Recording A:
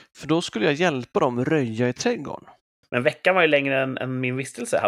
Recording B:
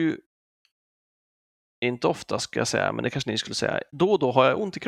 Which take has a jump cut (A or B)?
A